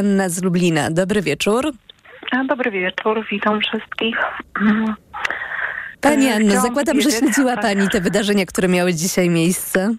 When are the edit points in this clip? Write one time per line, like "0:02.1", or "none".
0:06.0